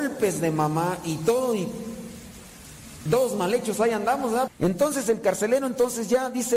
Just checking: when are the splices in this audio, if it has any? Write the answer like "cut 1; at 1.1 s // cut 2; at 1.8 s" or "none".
cut 1; at 3.1 s // cut 2; at 4.5 s